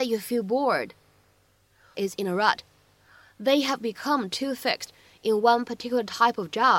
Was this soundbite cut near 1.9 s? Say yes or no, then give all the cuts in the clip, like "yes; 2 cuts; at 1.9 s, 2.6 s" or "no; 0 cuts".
yes; 1 cut; at 1.9 s